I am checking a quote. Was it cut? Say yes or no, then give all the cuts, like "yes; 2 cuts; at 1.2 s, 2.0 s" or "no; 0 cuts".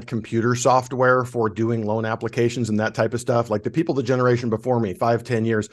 no; 0 cuts